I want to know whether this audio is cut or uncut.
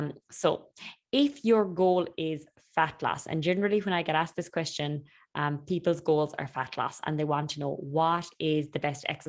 uncut